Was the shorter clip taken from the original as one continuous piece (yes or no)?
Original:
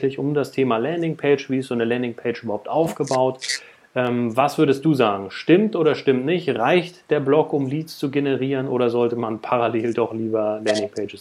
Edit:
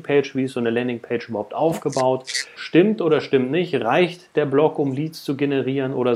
no